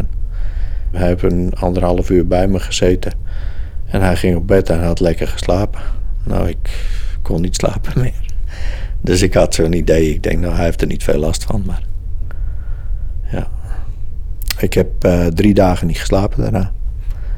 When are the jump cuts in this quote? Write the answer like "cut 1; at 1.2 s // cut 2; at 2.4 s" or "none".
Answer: cut 1; at 0.9 s